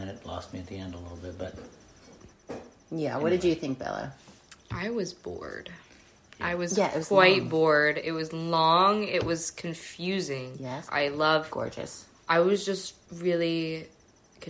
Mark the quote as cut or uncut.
cut